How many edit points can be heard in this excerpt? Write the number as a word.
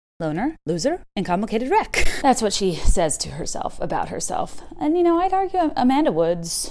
one